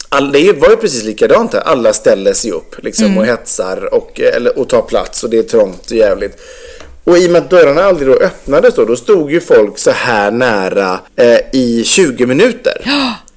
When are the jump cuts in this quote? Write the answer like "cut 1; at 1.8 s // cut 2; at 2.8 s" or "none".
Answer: cut 1; at 11.1 s